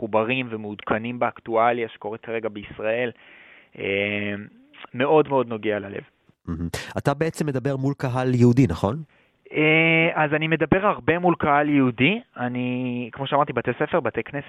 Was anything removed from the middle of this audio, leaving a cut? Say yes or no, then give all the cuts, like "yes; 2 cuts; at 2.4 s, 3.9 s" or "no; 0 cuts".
no; 0 cuts